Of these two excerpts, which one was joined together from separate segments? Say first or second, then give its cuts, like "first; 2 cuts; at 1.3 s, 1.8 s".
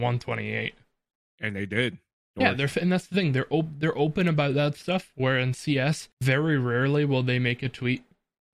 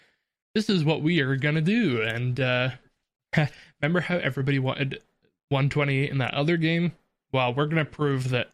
first; 2 cuts; at 2.4 s, 6.1 s